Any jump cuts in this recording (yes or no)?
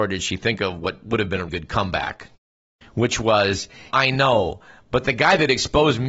yes